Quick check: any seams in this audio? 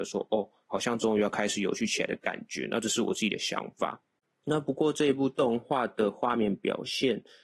no; 0 cuts

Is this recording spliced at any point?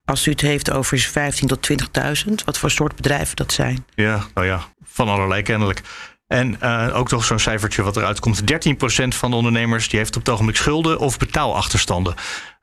yes; 1 cut; at 4.7 s

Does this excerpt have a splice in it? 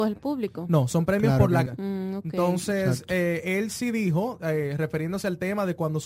yes; 1 cut; at 1.7 s

